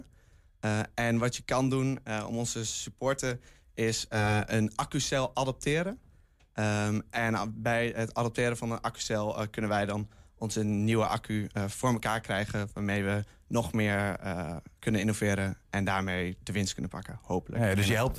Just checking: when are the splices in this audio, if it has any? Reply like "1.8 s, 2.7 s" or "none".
none